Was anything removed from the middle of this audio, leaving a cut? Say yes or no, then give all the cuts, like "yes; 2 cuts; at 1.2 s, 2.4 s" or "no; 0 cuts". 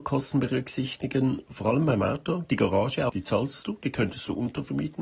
yes; 1 cut; at 3.1 s